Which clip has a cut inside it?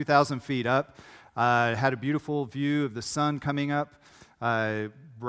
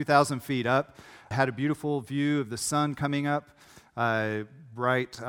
second; 1 cut; at 1.3 s

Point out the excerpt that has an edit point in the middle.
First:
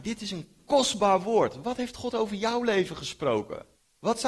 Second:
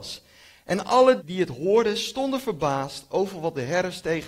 second; 1 cut; at 1.2 s

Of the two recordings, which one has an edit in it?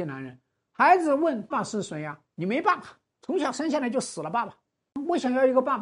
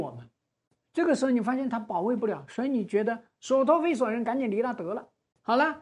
first; 1 cut; at 1.5 s

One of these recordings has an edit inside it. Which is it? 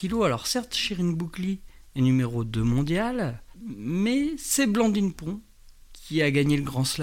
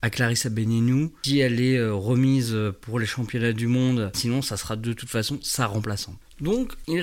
second; 1 cut; at 4.1 s

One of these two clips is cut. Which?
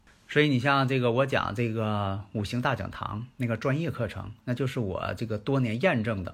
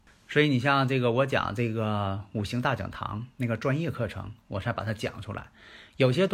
second; 1 cut; at 4.4 s

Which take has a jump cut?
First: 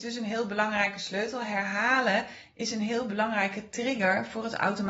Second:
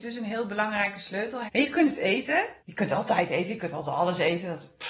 second; 2 cuts; at 1.5 s, 2.6 s

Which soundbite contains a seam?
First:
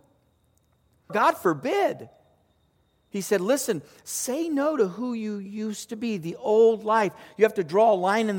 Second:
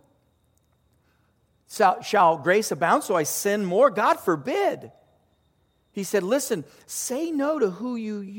first; 1 cut; at 1.1 s

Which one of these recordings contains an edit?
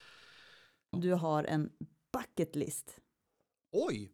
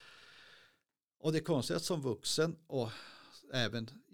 first; 1 cut; at 0.9 s

